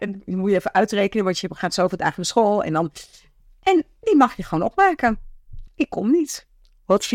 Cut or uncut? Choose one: cut